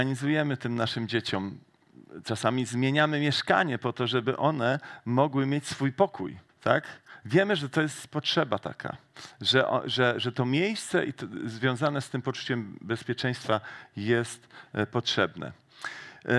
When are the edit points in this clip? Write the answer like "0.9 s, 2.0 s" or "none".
6.5 s